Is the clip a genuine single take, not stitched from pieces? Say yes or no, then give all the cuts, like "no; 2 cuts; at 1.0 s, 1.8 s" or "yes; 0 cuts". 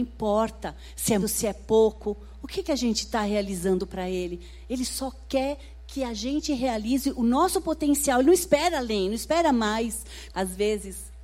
no; 2 cuts; at 1.2 s, 10.3 s